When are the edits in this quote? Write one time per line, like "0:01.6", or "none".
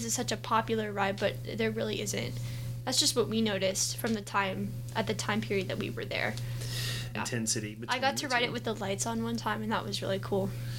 0:07.2

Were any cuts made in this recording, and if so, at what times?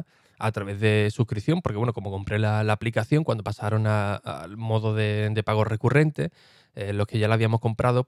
none

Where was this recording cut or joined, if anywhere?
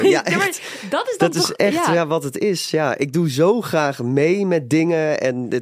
none

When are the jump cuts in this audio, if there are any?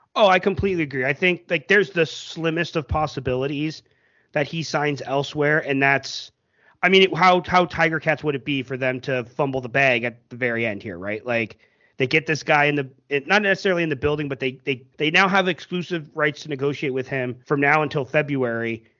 0:14.9
0:17.4

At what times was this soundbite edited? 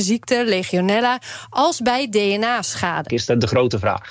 0:03.1

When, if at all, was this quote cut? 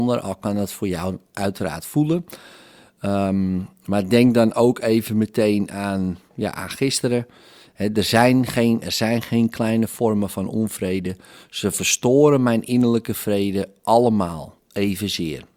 0:08.8

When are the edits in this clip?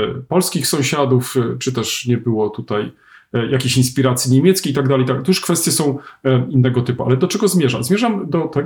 none

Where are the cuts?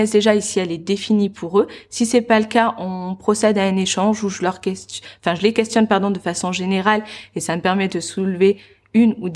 none

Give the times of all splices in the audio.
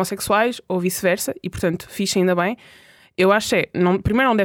none

